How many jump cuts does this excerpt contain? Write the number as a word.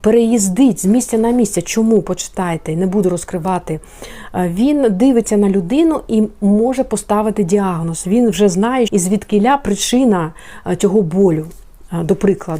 one